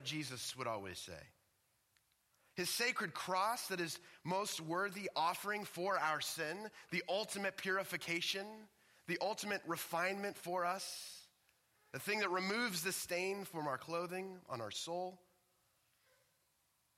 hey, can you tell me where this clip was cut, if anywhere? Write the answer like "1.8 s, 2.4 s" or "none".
none